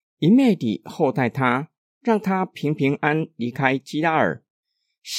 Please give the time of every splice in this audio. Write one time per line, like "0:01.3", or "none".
0:03.0